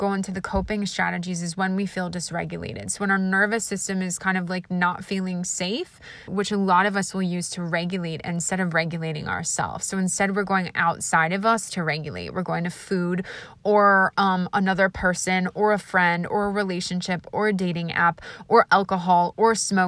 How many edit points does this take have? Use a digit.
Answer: 1